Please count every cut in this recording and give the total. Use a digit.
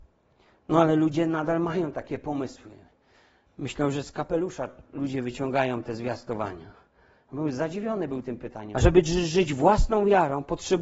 2